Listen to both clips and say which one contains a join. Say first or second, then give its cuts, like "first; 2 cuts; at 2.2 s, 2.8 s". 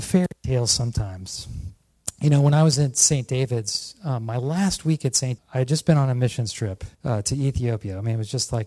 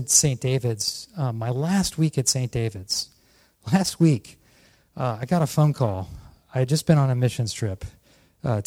first; 2 cuts; at 5.4 s, 6.9 s